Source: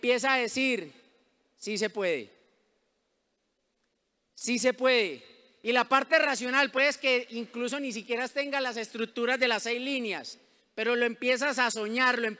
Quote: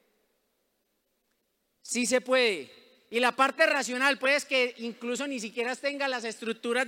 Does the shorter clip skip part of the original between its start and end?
no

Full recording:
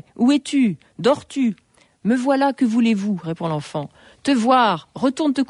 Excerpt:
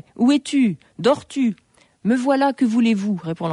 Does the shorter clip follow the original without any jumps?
yes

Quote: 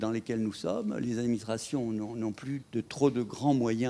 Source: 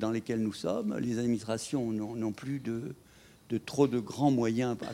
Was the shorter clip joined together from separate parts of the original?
yes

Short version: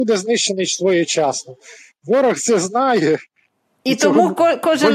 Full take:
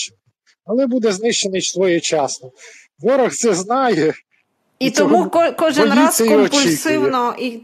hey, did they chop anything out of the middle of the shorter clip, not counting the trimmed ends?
no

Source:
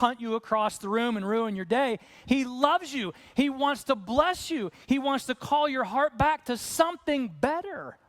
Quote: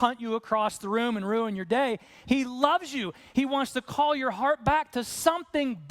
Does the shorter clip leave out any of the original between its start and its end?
yes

